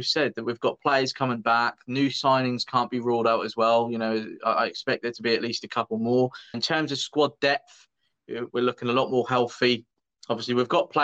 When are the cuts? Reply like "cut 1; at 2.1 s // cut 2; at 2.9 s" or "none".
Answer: cut 1; at 6.5 s

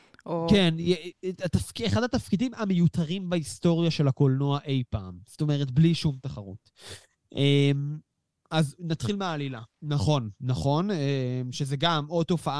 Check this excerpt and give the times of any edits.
cut 1; at 9.7 s

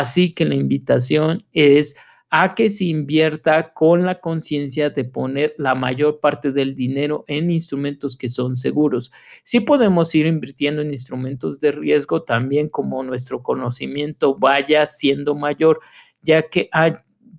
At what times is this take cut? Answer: none

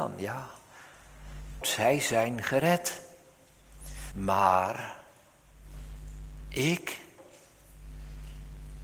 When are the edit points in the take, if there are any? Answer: cut 1; at 1.6 s // cut 2; at 4.1 s

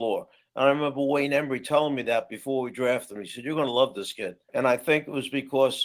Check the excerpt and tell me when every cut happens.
cut 1; at 4.5 s

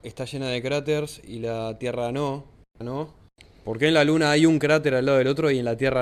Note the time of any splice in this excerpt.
cut 1; at 2.8 s

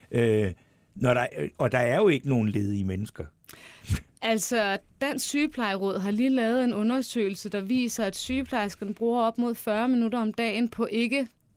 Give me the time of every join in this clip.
none

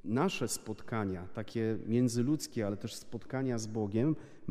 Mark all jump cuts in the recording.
none

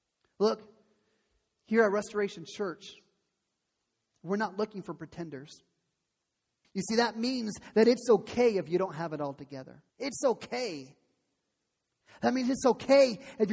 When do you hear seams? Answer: cut 1; at 6.6 s // cut 2; at 9.9 s

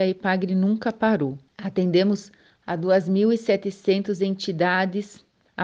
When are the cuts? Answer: cut 1; at 1.5 s

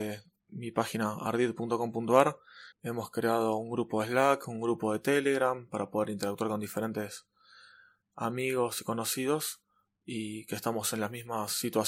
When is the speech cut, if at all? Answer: cut 1; at 2.7 s

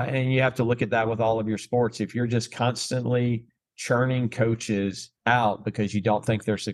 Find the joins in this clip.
cut 1; at 5.2 s

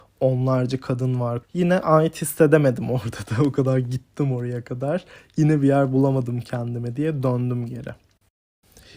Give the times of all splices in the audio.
cut 1; at 1.4 s

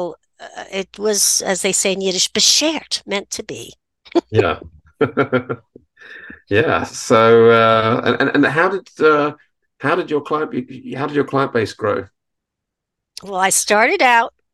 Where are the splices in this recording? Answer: none

